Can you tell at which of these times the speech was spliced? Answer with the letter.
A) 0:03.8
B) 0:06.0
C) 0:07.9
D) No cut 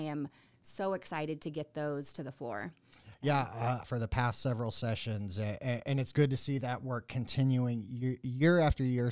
A